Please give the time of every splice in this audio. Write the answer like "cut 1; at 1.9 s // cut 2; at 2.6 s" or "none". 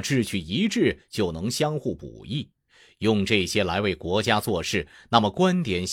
none